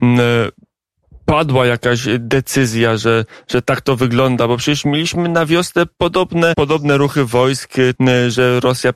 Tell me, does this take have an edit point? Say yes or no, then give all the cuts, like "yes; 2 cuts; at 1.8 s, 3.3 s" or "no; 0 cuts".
yes; 2 cuts; at 6.5 s, 8.0 s